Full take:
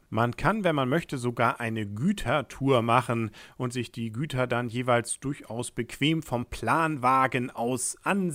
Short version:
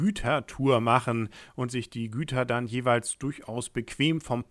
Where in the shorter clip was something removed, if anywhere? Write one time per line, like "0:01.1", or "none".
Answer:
none